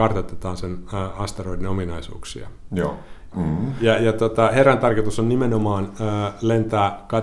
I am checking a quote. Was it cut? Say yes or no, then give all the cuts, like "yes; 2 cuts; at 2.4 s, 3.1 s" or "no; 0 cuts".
yes; 1 cut; at 3.3 s